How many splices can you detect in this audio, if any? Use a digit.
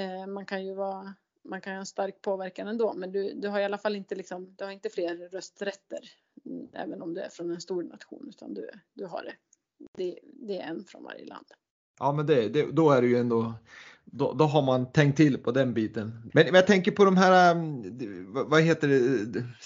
1